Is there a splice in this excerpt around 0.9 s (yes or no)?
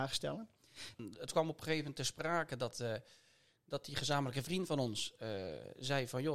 yes